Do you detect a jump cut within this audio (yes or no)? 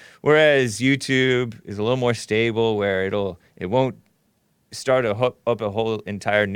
no